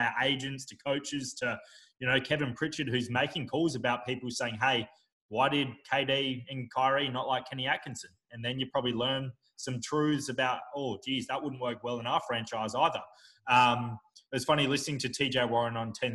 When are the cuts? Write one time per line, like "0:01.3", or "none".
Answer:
none